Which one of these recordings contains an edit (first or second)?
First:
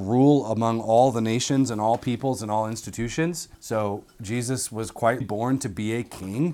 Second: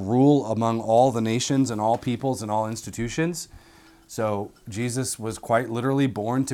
first